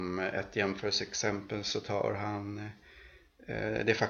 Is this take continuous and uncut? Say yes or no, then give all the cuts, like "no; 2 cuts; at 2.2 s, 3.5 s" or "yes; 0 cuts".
yes; 0 cuts